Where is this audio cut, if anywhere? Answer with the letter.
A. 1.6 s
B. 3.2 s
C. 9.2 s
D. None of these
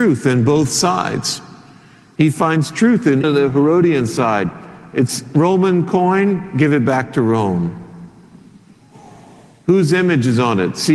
B